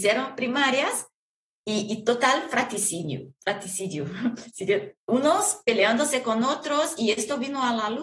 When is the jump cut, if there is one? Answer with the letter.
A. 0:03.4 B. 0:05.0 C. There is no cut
B